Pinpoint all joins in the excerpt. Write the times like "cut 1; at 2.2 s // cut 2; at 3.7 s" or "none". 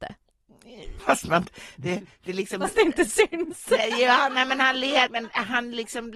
cut 1; at 1.0 s // cut 2; at 5.1 s